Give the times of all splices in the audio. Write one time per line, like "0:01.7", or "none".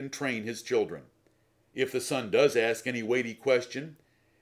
0:01.6